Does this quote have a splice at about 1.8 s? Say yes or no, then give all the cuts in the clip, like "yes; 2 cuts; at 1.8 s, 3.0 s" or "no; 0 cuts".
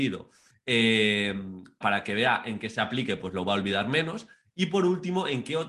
yes; 1 cut; at 1.8 s